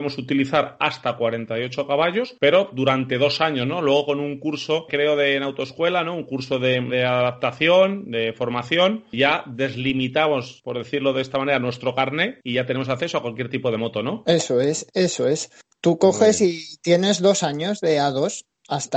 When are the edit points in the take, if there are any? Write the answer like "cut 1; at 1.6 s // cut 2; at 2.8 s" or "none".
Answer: cut 1; at 6.9 s